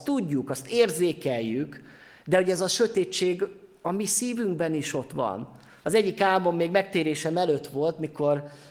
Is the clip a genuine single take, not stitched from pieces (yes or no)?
no